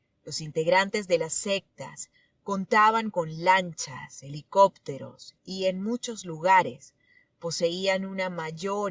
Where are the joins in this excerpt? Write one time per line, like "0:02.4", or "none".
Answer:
none

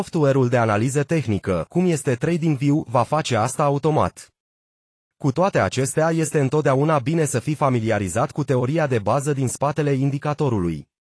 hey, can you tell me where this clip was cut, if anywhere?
none

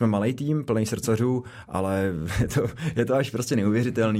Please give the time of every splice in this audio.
none

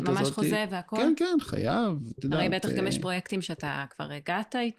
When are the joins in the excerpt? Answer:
none

